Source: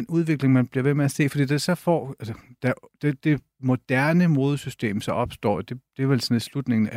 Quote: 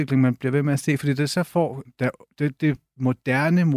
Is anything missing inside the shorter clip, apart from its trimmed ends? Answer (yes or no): yes